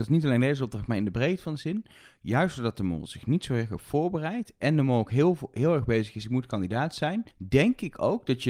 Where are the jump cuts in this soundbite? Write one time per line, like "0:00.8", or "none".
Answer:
0:07.3